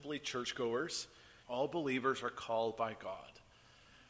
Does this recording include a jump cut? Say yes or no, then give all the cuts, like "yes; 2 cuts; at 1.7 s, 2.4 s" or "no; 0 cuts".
yes; 1 cut; at 1.4 s